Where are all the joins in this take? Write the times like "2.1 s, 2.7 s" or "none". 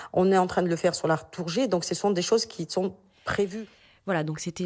none